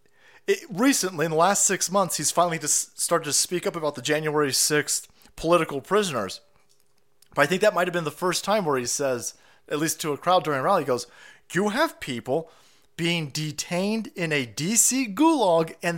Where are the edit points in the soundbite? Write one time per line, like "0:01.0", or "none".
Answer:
none